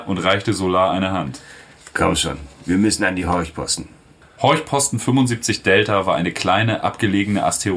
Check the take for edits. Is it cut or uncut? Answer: cut